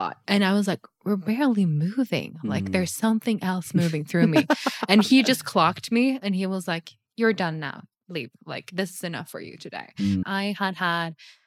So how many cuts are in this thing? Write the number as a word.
one